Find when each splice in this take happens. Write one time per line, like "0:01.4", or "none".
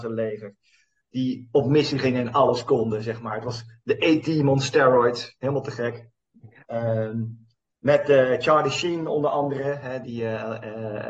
none